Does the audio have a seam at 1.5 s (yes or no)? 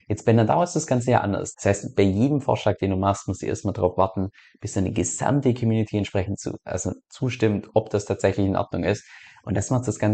yes